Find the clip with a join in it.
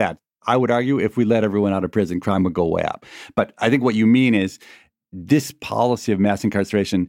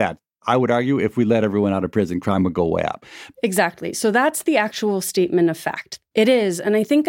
second; 2 cuts; at 3.3 s, 6.1 s

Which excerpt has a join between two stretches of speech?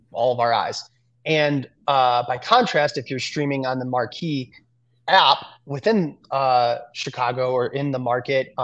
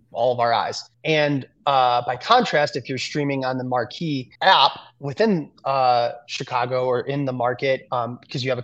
second; 2 cuts; at 0.9 s, 4.4 s

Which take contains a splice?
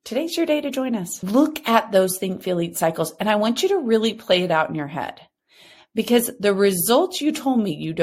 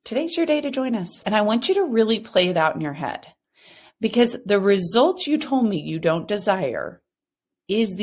second; 1 cut; at 1.2 s

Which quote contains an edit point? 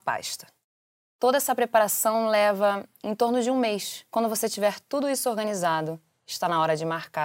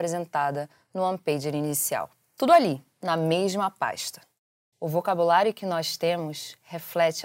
second; 1 cut; at 4.7 s

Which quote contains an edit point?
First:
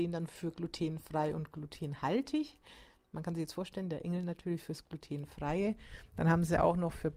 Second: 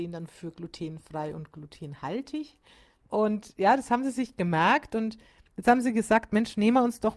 second; 1 cut; at 3.0 s

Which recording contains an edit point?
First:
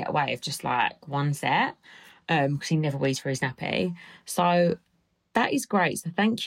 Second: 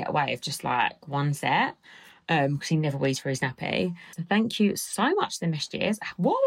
second; 1 cut; at 4.1 s

